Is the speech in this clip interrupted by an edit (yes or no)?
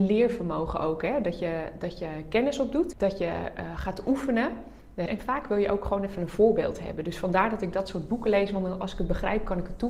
yes